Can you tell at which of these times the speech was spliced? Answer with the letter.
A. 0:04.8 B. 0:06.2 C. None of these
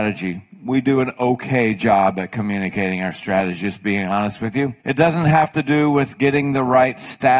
A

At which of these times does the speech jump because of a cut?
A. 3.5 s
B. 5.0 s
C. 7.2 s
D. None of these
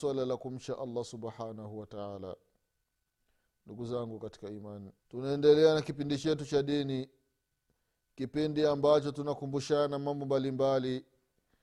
B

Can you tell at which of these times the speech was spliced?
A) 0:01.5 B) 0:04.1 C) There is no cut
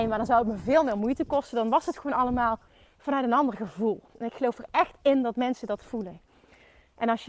C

